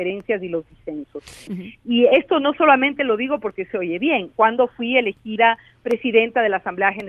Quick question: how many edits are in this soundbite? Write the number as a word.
two